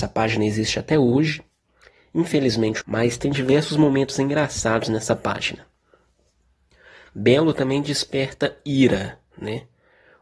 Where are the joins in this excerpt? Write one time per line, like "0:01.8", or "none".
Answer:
0:02.8